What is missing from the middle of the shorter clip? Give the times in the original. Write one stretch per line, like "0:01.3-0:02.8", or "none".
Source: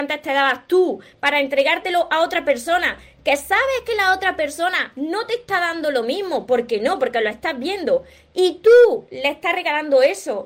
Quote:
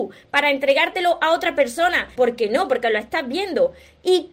0:03.0-0:06.5